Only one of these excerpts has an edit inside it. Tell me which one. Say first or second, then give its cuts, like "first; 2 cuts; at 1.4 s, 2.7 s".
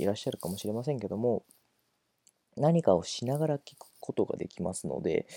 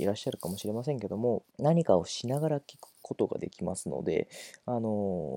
second; 1 cut; at 1.5 s